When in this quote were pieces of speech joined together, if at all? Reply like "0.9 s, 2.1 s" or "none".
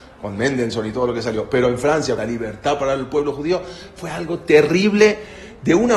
2.2 s